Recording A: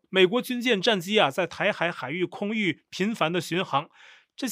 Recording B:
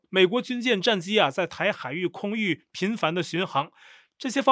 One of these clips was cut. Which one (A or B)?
B